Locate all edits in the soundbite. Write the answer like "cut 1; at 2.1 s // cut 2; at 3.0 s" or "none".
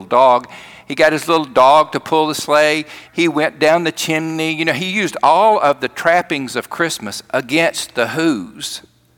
cut 1; at 3.1 s